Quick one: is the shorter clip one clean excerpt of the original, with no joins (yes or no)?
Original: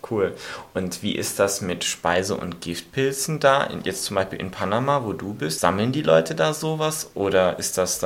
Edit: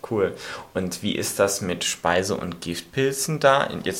yes